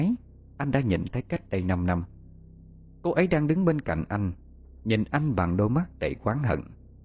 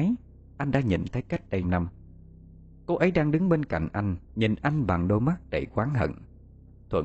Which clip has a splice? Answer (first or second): second